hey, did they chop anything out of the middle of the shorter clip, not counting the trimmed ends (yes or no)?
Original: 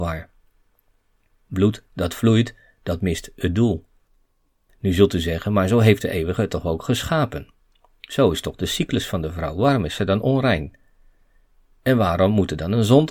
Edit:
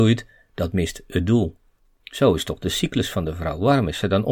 yes